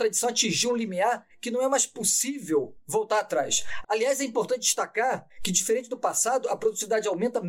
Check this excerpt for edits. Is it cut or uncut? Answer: cut